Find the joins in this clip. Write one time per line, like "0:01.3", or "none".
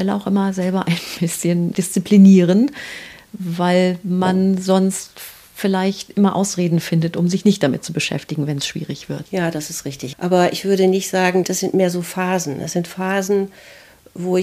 0:10.1
0:11.4